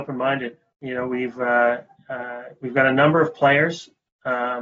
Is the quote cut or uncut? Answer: uncut